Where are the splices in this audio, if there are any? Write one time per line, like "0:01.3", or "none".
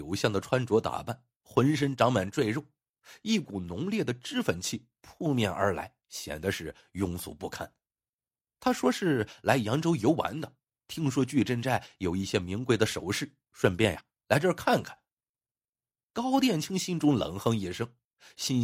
none